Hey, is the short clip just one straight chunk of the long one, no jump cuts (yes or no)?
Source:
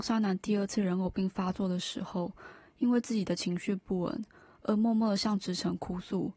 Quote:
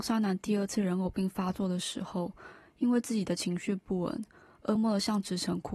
no